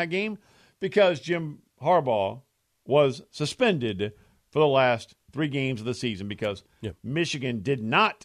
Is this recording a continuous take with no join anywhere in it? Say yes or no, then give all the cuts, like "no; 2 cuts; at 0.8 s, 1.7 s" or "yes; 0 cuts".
yes; 0 cuts